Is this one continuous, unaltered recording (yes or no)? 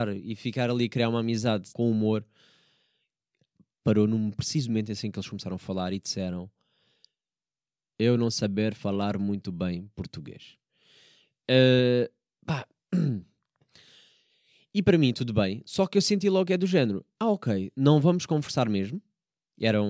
no